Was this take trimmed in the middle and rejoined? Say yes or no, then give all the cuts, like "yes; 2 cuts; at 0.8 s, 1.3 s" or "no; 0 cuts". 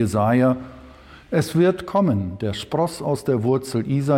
no; 0 cuts